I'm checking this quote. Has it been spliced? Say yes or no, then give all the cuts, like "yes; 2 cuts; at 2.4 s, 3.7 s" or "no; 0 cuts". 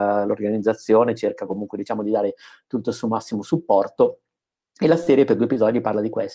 no; 0 cuts